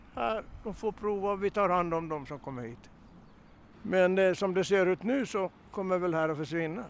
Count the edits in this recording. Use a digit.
1